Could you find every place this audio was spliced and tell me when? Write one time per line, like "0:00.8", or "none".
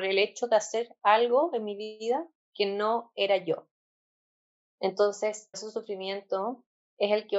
0:05.5